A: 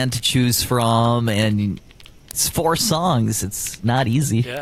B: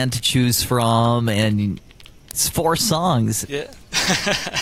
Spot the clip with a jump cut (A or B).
B